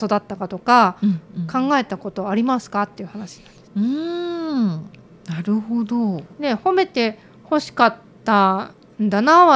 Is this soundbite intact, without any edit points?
no; 2 cuts; at 3.7 s, 6.3 s

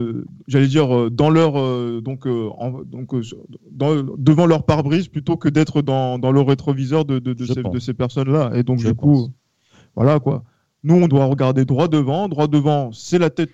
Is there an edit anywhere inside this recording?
no; 0 cuts

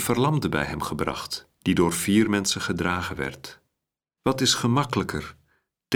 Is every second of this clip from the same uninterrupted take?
no; 1 cut; at 4.2 s

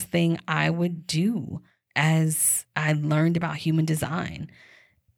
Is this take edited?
no; 0 cuts

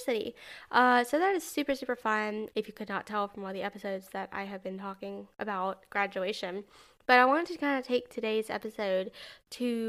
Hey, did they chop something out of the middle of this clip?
yes; 1 cut; at 2.5 s

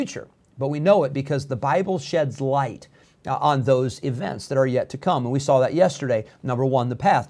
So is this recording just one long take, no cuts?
yes; 0 cuts

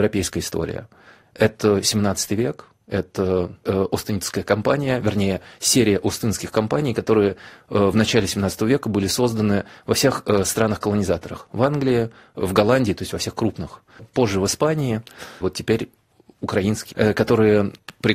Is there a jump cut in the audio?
yes; 2 cuts; at 15.4 s, 16.9 s

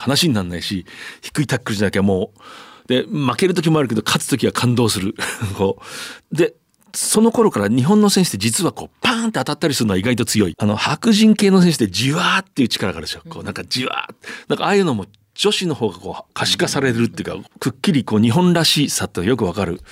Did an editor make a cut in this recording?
yes; 1 cut; at 10.5 s

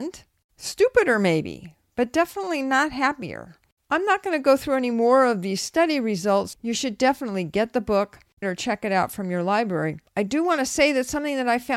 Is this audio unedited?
no; 3 cuts; at 6.5 s, 8.4 s, 10.1 s

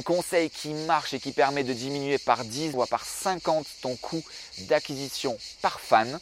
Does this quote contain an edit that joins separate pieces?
yes; 1 cut; at 2.7 s

